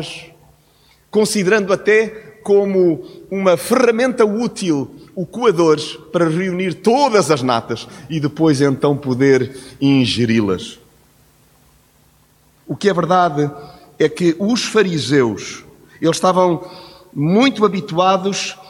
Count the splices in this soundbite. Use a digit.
0